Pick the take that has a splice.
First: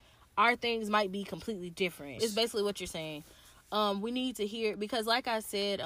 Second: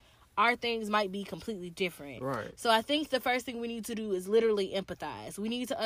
first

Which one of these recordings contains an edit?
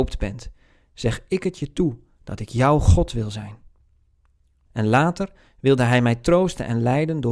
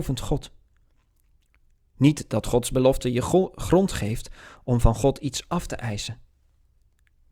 first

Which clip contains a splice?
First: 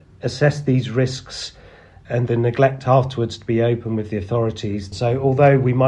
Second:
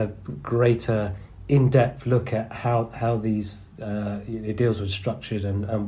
first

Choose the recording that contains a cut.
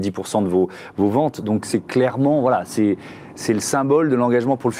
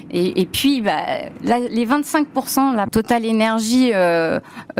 second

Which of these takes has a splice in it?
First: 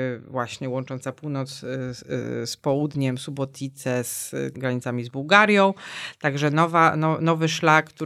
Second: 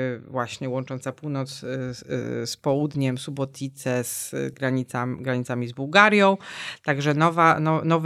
first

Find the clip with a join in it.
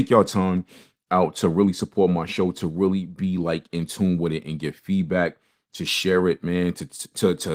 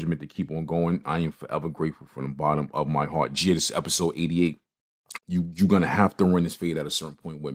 second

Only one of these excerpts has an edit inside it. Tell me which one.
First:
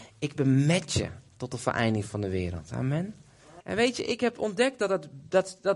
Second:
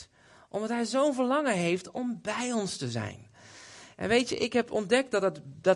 first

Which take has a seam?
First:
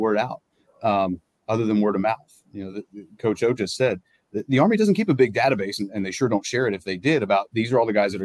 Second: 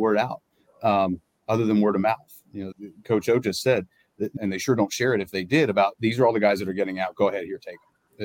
second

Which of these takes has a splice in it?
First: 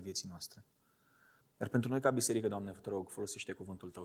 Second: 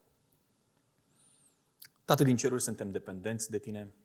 first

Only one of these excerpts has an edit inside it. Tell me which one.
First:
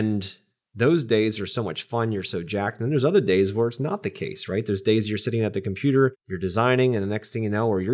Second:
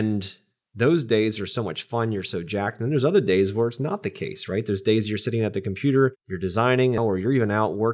second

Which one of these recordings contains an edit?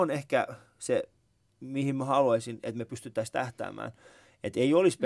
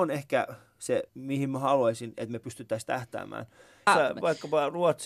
second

